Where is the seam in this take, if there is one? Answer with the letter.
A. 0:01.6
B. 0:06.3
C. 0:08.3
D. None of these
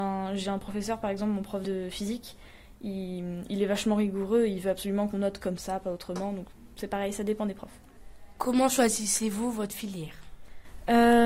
A